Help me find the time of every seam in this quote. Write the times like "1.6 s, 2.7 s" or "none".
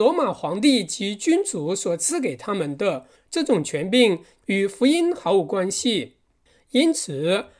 3.1 s, 4.4 s